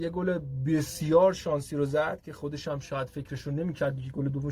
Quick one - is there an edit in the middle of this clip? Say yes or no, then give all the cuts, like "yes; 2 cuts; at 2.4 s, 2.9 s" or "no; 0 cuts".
no; 0 cuts